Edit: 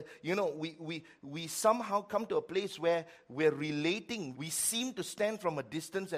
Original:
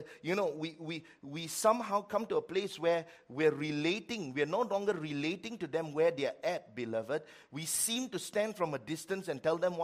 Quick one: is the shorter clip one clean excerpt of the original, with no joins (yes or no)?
no